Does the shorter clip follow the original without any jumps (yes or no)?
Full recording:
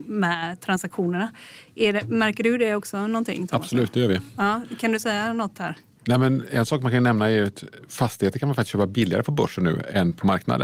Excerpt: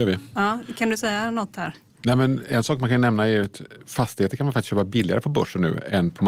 yes